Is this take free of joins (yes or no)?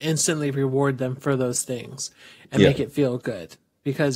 yes